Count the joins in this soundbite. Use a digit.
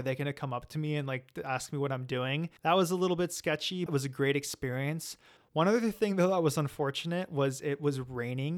2